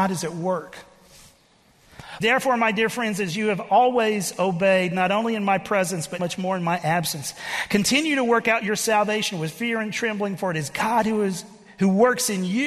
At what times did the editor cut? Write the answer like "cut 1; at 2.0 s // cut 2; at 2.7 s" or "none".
cut 1; at 2.2 s // cut 2; at 6.2 s